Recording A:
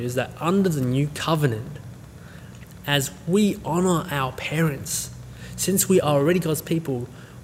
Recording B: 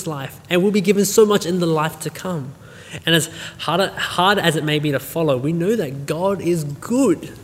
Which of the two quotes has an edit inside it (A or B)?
B